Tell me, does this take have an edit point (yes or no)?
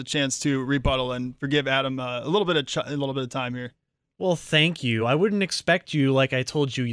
no